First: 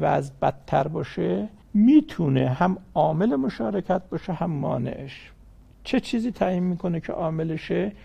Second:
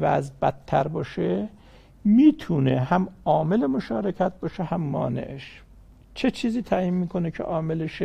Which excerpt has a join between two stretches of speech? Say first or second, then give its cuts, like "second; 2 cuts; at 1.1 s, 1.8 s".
first; 1 cut; at 1.6 s